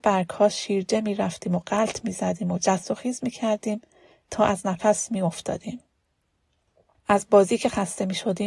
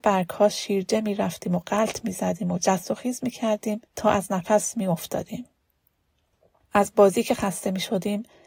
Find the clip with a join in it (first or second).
second